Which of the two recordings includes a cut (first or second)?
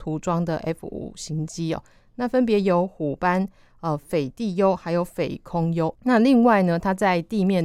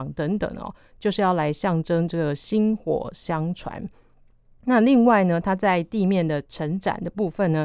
first